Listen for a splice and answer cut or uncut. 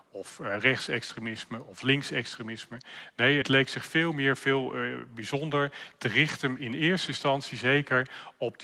uncut